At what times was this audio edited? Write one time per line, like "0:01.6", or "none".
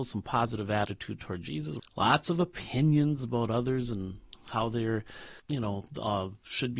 0:01.8
0:05.4